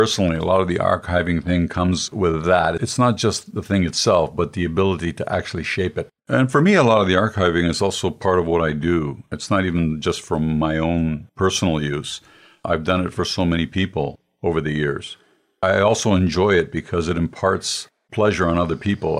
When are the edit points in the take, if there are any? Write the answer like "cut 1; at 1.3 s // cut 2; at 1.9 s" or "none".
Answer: cut 1; at 6.2 s